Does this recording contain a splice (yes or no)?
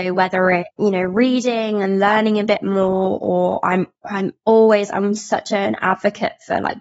no